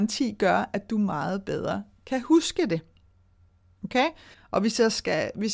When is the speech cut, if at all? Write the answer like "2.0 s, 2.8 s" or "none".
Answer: 4.3 s